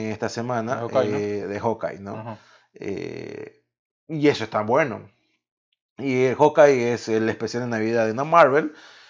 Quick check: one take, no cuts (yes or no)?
yes